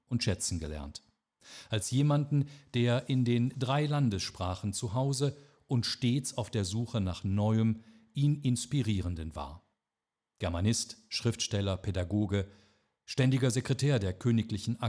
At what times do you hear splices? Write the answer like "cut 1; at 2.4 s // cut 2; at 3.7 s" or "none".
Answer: none